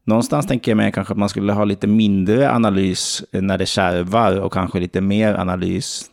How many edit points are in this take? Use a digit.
0